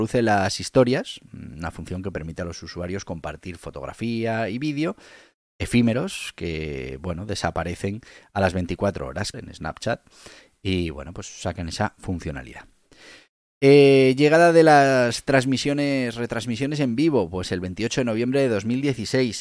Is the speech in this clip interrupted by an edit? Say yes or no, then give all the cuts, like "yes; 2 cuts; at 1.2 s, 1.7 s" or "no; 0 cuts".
yes; 1 cut; at 9.3 s